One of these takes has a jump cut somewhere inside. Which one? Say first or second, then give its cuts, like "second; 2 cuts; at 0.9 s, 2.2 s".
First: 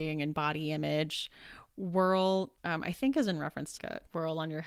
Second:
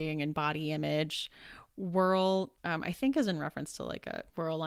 first; 1 cut; at 3.8 s